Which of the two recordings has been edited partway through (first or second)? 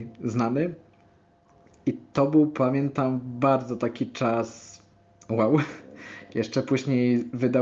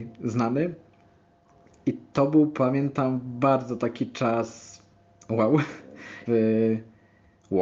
second